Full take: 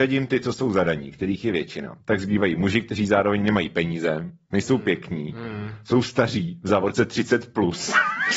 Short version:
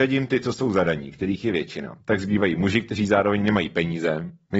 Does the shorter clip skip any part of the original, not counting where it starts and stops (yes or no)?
no